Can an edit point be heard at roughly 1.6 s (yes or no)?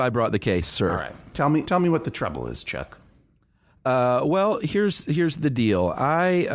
yes